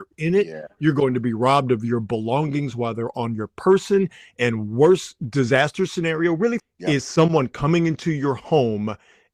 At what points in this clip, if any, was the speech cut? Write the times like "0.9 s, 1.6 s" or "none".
6.6 s